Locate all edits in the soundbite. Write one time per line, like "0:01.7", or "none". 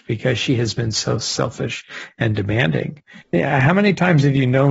0:03.2